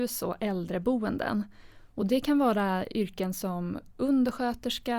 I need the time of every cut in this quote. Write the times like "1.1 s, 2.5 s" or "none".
none